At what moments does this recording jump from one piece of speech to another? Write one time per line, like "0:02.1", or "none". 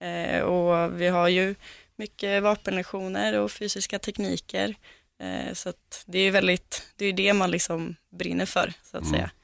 none